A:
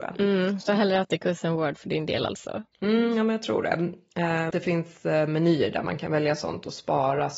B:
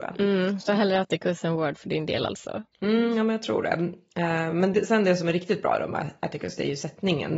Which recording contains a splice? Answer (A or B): A